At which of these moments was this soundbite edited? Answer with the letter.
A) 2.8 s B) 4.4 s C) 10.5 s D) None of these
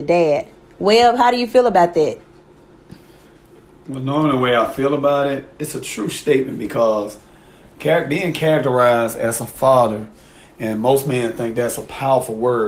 D